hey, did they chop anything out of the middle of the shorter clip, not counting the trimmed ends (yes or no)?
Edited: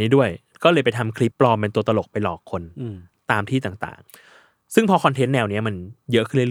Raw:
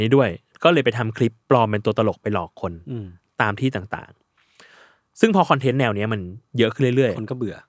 yes